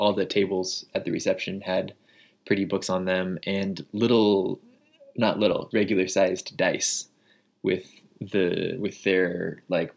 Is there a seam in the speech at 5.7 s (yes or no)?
yes